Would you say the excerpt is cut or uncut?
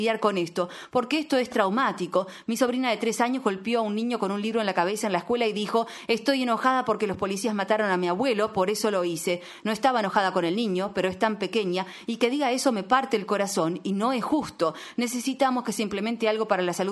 uncut